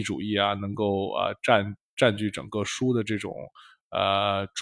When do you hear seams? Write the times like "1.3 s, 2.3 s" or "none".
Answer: none